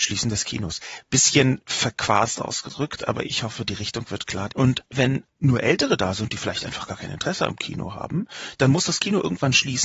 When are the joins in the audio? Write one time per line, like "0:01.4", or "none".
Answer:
0:03.2
0:04.5